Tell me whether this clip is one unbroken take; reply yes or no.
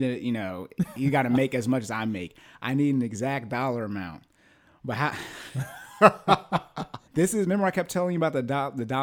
no